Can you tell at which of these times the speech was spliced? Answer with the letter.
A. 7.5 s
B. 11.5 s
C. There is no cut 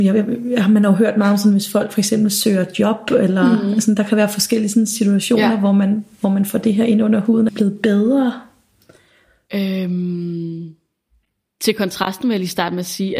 A